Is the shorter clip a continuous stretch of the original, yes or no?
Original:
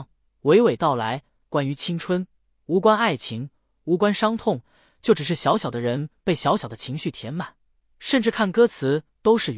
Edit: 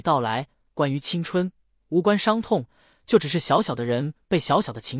no